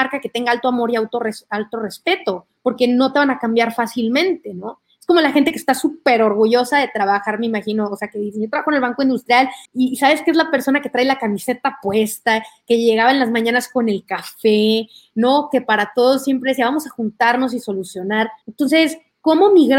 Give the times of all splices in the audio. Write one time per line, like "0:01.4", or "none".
0:09.7
0:18.4